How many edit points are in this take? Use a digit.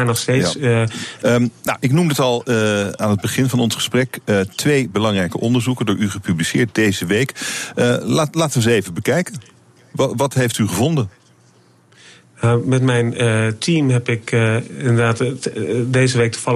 1